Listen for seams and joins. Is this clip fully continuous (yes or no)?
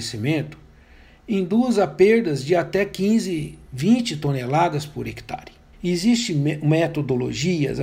no